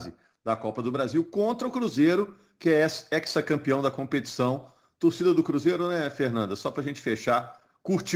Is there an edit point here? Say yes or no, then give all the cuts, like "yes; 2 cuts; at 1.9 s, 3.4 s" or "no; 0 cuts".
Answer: no; 0 cuts